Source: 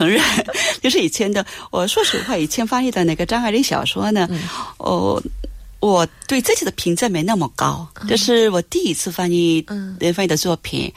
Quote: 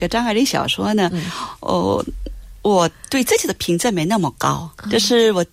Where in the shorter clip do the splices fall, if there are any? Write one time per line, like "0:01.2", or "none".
none